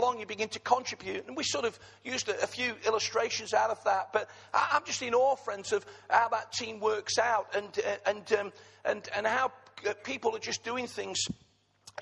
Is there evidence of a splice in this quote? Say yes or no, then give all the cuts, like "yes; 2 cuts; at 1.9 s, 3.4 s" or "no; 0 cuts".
no; 0 cuts